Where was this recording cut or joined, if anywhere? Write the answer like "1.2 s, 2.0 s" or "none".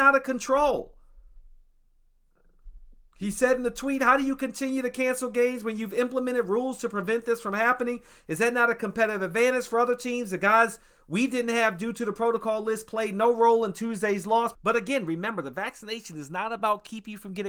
14.5 s